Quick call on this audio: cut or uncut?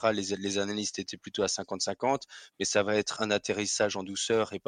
cut